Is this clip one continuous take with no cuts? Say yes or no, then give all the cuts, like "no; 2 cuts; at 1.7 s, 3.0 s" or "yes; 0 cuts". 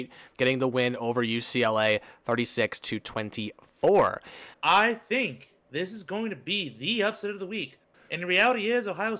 no; 2 cuts; at 4.5 s, 7.9 s